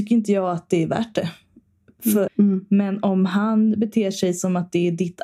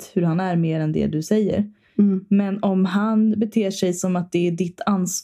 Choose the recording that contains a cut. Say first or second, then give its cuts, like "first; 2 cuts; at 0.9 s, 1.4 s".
first; 1 cut; at 2.3 s